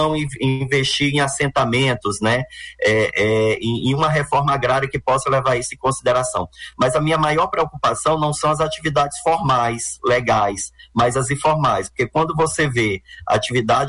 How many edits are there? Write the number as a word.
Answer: zero